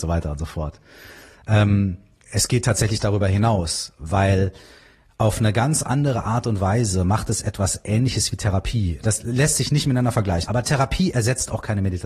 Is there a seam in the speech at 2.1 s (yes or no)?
no